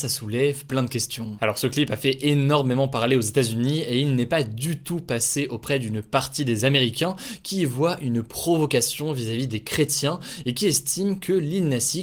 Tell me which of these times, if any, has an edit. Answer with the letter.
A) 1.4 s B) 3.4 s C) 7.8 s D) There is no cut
A